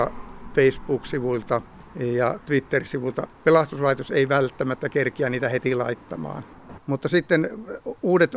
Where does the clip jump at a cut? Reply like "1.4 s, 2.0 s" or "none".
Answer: 3.3 s, 6.8 s